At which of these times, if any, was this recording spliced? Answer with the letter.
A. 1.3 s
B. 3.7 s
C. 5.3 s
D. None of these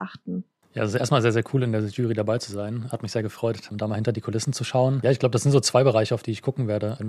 B